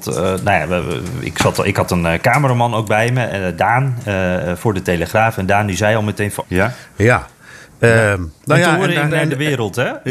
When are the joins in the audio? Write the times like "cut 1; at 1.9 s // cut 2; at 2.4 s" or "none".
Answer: cut 1; at 6.4 s // cut 2; at 9.1 s